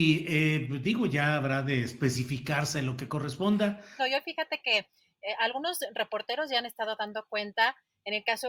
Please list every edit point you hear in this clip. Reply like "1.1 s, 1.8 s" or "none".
4.0 s